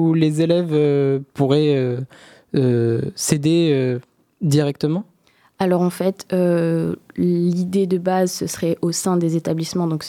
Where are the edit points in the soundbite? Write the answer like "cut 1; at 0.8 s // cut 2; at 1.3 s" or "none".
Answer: none